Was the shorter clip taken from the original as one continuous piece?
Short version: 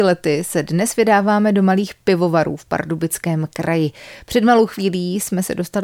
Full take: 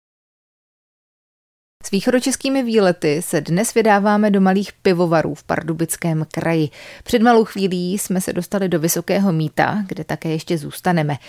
yes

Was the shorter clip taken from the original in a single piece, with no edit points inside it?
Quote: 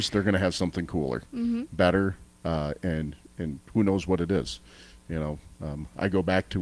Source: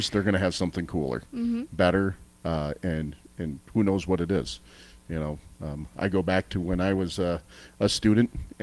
yes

